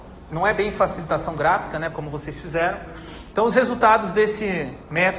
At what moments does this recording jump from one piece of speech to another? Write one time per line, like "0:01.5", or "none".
0:01.9
0:03.3

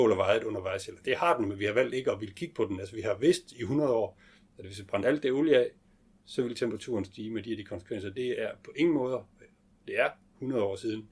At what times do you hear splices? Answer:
none

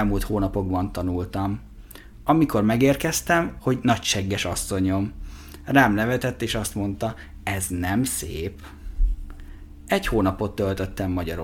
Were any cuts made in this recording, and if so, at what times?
0:03.6

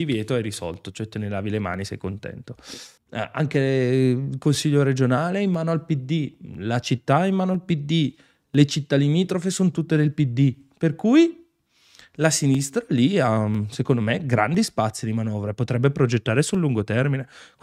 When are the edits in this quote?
0:03.0

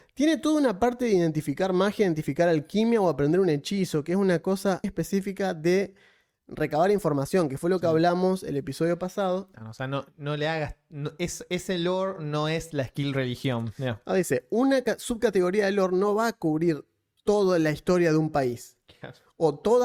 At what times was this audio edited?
0:04.8
0:09.5

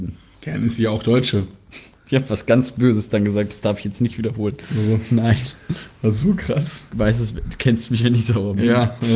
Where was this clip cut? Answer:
0:06.9

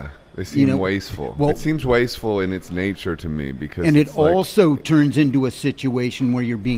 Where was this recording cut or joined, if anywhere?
none

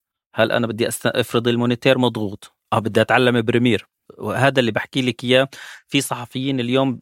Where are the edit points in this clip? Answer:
none

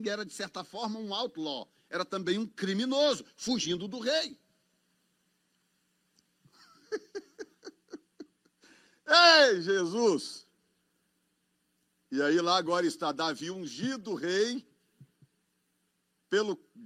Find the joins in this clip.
none

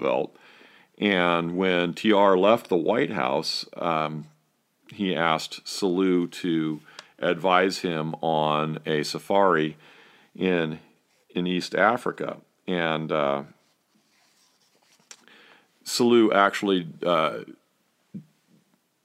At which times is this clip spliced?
none

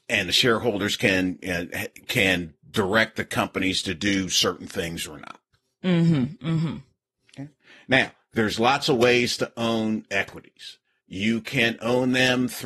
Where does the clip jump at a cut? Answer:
0:11.0

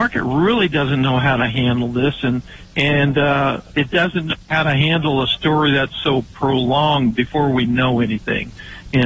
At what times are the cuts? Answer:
0:03.7

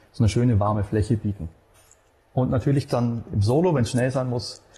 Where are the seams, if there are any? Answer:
none

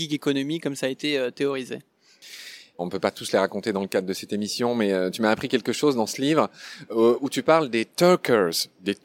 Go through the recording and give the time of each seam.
0:02.8

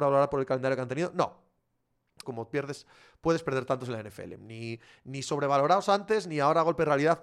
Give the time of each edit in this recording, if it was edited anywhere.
0:02.2

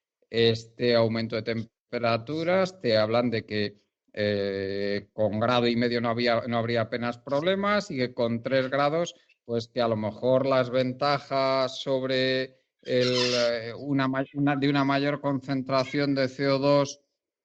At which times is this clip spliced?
none

